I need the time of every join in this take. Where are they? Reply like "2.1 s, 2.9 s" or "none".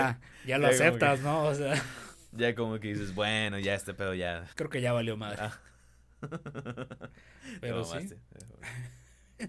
4.5 s